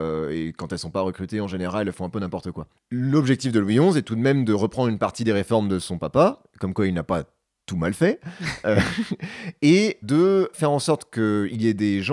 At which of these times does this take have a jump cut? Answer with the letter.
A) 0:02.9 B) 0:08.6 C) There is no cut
C